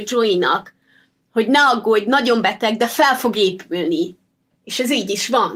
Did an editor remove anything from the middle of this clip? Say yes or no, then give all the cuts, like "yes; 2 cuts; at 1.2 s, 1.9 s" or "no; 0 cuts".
no; 0 cuts